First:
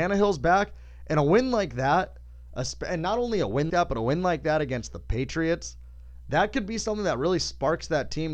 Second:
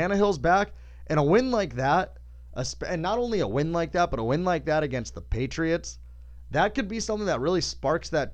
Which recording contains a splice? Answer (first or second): first